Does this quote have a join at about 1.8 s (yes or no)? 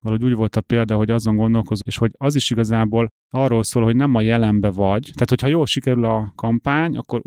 yes